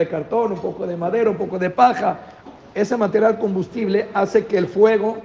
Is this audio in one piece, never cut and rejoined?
yes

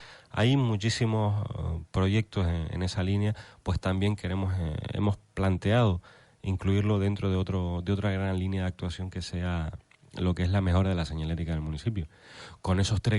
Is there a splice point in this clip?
no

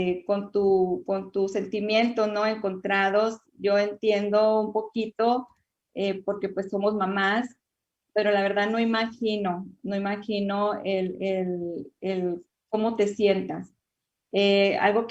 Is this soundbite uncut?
yes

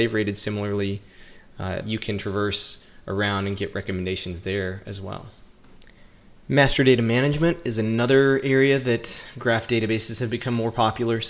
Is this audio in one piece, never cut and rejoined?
no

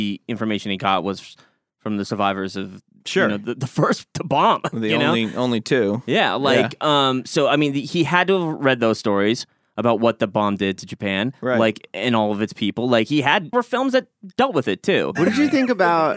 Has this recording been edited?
yes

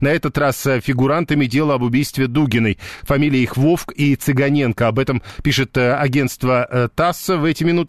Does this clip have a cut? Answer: no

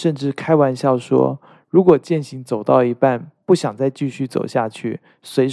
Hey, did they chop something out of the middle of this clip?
no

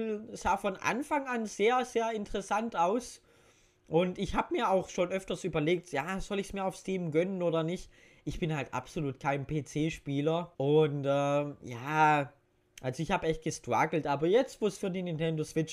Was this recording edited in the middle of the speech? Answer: yes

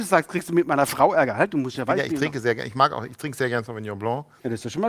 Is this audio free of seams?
yes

